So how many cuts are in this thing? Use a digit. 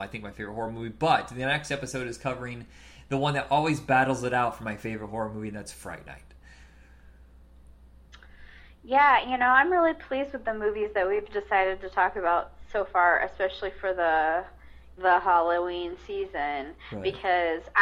1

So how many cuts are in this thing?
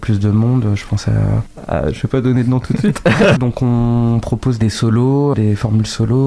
2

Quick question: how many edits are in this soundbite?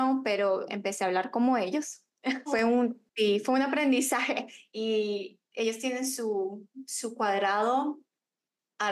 1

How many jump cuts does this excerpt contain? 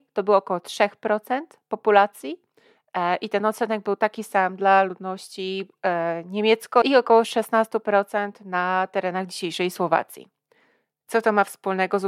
1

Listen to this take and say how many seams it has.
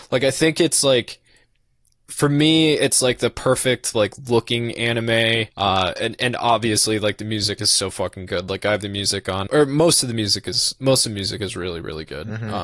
3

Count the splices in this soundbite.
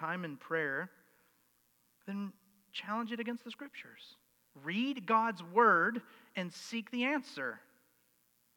0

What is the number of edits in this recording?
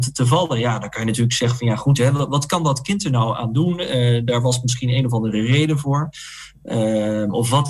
0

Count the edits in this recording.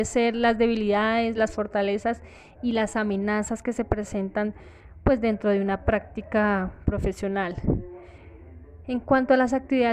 1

